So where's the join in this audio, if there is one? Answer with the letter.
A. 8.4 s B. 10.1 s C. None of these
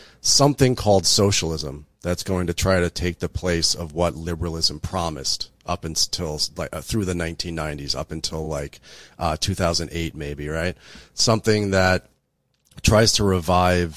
C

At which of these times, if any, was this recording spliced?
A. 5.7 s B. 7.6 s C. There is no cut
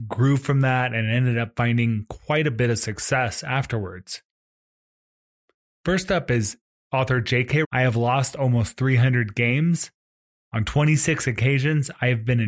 B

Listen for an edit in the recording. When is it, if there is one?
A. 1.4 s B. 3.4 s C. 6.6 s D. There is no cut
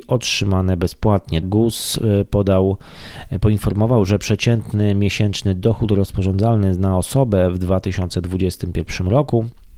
A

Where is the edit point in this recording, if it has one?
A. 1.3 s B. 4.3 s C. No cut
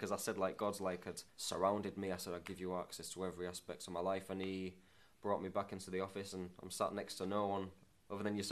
A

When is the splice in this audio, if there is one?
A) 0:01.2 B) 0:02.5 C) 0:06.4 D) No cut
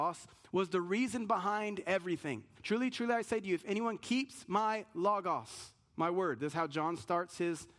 B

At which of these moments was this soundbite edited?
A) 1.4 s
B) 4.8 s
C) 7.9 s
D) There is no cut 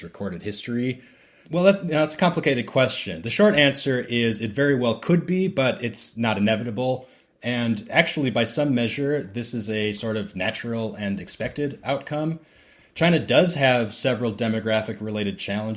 A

